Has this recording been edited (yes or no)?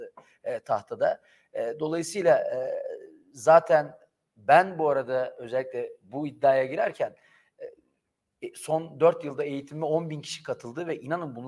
no